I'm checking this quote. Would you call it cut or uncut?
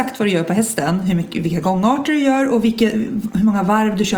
uncut